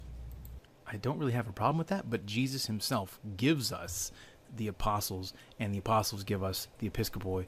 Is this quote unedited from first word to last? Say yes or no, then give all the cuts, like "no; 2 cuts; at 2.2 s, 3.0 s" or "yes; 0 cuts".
yes; 0 cuts